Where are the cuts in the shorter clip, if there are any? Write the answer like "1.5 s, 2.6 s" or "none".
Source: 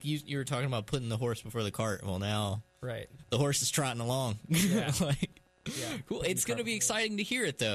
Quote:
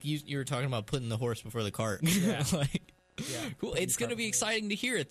2.0 s